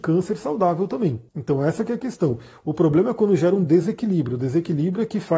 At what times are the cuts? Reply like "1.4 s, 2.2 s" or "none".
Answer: 1.3 s